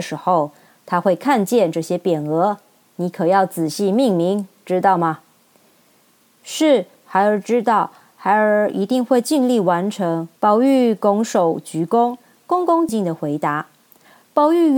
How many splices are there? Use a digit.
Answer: 2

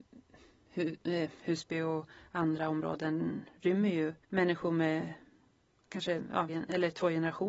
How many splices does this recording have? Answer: 2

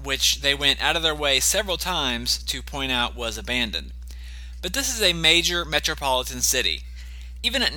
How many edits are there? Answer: 0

